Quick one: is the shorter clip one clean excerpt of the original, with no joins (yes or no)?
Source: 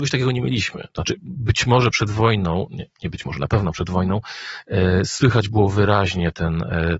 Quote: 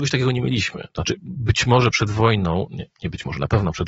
yes